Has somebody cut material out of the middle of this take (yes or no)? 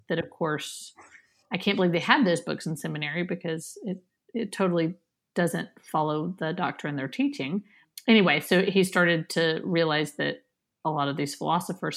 no